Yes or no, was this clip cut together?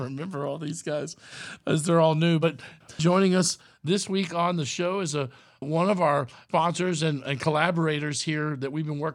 no